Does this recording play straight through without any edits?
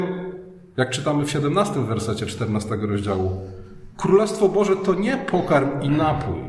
yes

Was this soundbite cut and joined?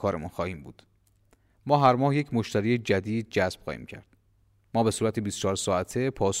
no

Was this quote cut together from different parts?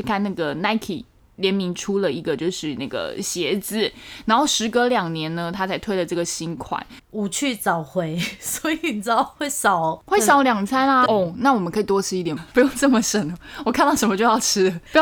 yes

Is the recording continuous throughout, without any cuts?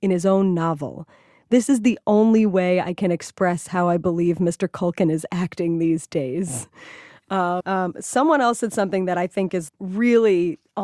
no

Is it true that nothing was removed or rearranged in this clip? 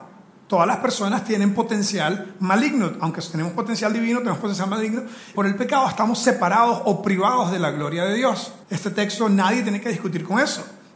no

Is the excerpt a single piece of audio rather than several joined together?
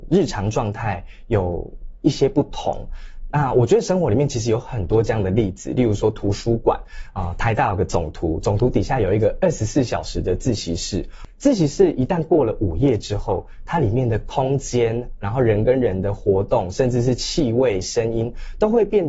yes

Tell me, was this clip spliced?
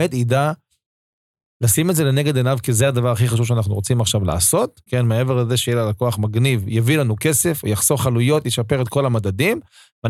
yes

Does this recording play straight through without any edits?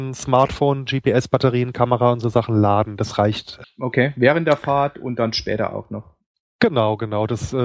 no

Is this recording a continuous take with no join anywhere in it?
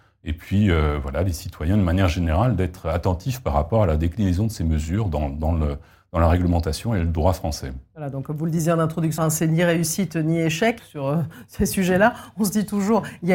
no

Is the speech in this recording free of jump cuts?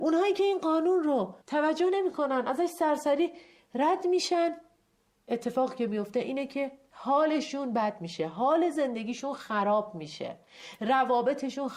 no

